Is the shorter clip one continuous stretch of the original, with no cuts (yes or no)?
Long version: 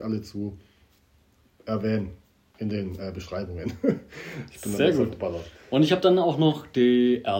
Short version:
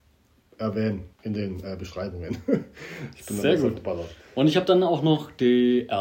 no